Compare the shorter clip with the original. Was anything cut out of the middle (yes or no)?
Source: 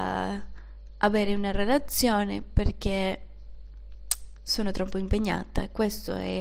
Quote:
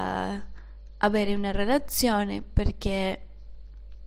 no